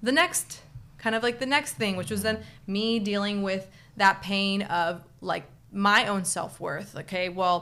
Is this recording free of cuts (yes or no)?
yes